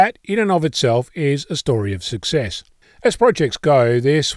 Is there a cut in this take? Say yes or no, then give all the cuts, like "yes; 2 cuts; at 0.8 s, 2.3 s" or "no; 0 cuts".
yes; 1 cut; at 2.8 s